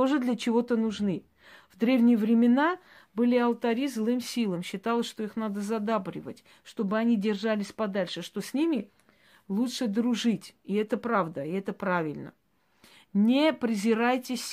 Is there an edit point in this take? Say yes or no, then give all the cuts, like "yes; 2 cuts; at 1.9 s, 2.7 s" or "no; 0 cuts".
no; 0 cuts